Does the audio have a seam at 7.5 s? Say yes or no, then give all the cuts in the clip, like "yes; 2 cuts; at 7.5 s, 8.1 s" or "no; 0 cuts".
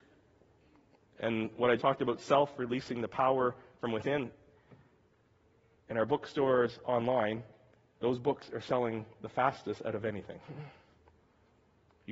no; 1 cut; at 1.8 s